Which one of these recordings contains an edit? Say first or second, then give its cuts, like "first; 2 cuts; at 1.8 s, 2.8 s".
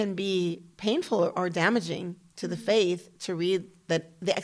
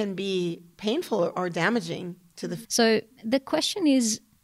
second; 1 cut; at 2.6 s